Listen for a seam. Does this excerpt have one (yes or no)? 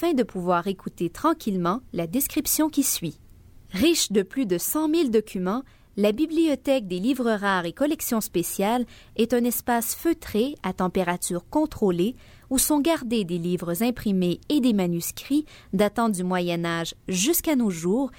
yes